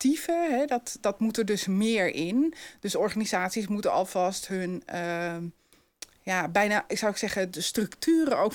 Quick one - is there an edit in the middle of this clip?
no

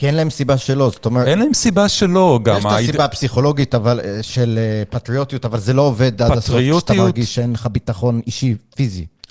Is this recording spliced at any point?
no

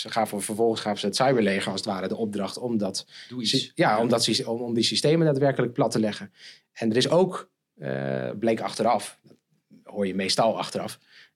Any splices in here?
no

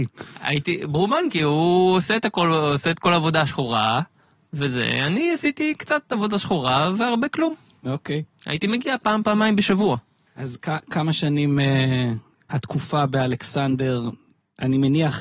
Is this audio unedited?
yes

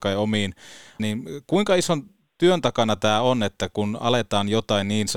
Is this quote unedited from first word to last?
no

